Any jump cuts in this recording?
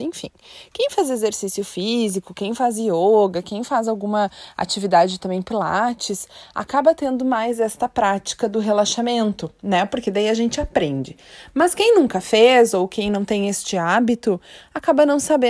no; 0 cuts

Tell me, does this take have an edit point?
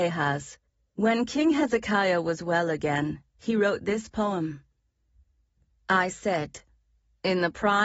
yes; 1 cut; at 0.9 s

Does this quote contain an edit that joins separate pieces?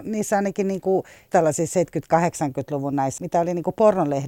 yes; 2 cuts; at 1.3 s, 3.2 s

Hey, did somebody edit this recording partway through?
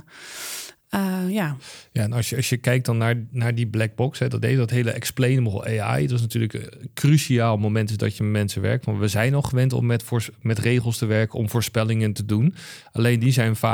no; 0 cuts

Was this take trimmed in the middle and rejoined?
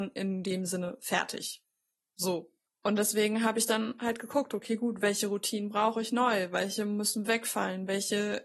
yes; 1 cut; at 2.7 s

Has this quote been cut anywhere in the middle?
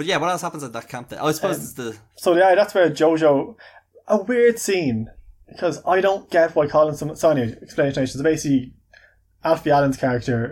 no; 0 cuts

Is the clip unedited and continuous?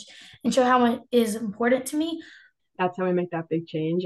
no; 1 cut; at 2.6 s

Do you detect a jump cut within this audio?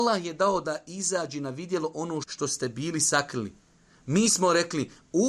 yes; 1 cut; at 2.2 s

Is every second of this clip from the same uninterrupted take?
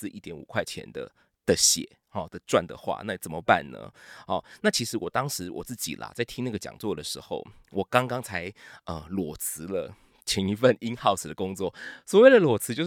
yes; 0 cuts

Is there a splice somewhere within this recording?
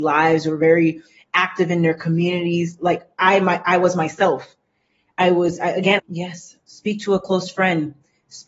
yes; 1 cut; at 6.0 s

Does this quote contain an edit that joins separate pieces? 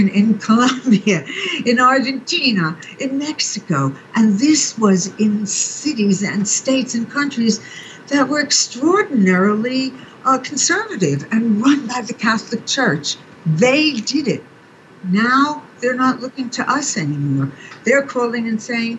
no; 0 cuts

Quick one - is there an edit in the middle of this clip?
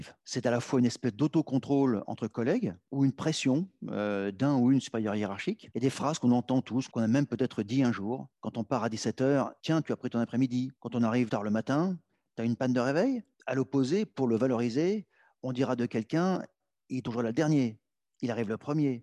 yes; 2 cuts; at 6.9 s, 11.3 s

